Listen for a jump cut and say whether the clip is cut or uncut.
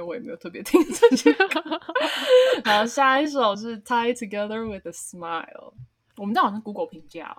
cut